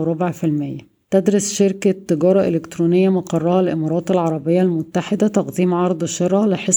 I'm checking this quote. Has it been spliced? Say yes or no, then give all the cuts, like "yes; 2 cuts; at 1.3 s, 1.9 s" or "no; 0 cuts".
yes; 1 cut; at 1.0 s